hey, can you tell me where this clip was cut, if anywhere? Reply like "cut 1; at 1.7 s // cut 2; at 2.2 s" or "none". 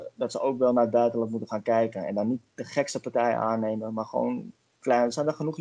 none